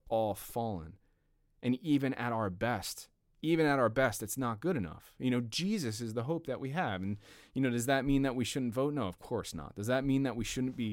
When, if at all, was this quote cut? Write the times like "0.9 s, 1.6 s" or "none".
none